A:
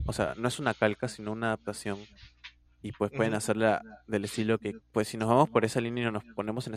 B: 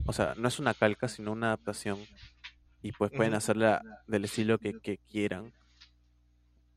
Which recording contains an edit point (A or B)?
A